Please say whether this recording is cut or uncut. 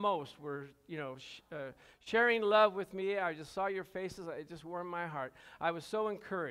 uncut